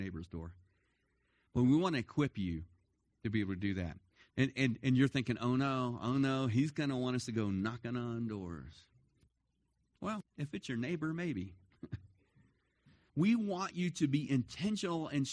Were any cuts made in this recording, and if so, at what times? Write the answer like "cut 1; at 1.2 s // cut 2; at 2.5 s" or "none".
cut 1; at 4.3 s // cut 2; at 13.1 s